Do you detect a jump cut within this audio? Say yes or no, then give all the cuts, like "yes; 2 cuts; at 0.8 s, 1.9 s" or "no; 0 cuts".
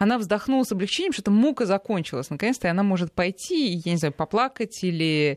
no; 0 cuts